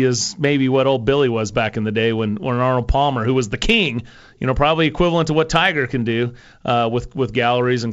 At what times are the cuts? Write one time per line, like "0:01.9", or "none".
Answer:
none